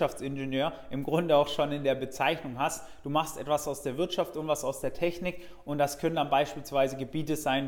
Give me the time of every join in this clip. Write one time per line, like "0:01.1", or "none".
none